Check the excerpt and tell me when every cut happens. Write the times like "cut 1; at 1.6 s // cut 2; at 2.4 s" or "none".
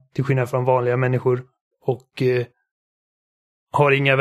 cut 1; at 1.7 s